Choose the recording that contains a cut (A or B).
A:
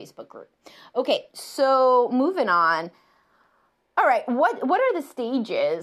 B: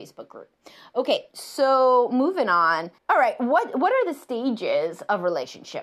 B